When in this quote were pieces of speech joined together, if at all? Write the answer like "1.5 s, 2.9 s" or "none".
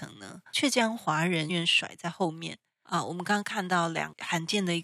1.5 s, 2.8 s